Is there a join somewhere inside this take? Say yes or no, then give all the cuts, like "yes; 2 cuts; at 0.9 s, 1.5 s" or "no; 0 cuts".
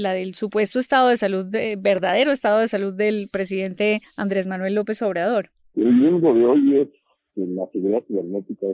yes; 1 cut; at 5.7 s